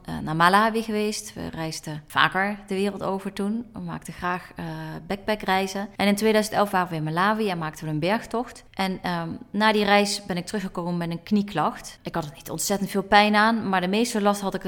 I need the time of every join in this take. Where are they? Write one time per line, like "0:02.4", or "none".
none